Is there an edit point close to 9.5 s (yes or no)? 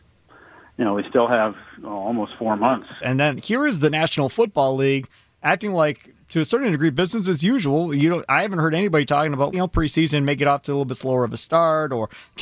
yes